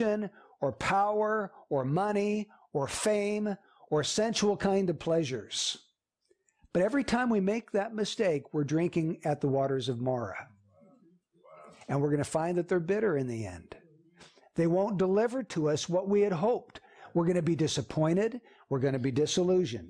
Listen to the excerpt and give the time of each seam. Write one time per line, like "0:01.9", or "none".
none